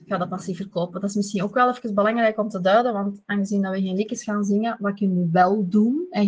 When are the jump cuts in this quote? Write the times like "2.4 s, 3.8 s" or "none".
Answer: none